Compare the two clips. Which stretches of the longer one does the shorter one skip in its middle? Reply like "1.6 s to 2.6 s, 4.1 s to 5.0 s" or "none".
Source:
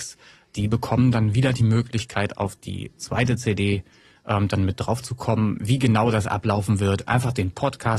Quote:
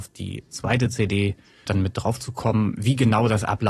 4.1 s to 4.5 s